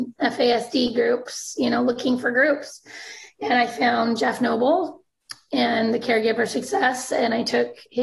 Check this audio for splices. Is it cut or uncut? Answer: uncut